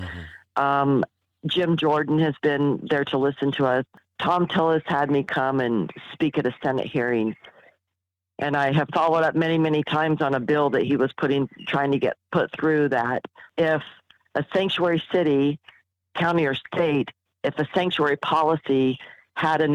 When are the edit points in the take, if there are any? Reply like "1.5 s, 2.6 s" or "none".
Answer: none